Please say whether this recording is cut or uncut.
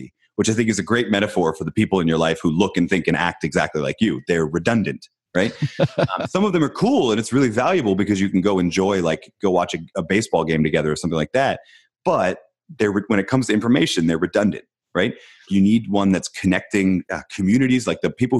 cut